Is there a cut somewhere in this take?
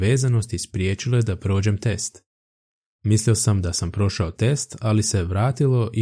yes; 1 cut; at 2.9 s

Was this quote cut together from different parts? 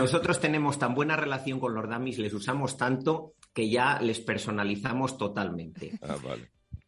no; 0 cuts

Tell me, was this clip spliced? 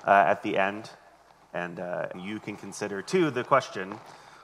yes; 1 cut; at 2.1 s

